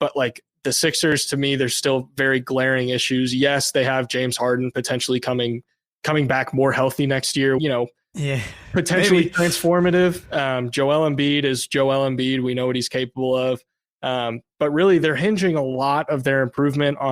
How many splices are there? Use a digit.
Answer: 1